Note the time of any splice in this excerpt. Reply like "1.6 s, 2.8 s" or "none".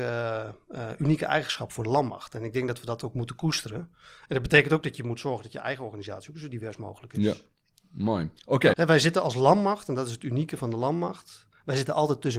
8.7 s